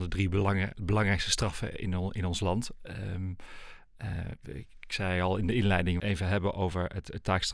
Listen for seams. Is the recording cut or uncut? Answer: cut